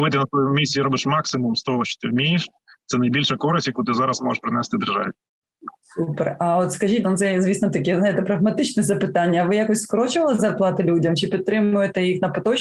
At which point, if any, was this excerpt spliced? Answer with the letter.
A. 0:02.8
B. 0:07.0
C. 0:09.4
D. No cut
B